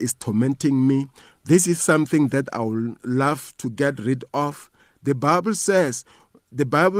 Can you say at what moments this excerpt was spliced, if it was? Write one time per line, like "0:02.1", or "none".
none